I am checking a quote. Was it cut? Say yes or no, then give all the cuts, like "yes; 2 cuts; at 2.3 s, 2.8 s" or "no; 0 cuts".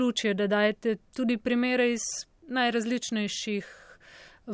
no; 0 cuts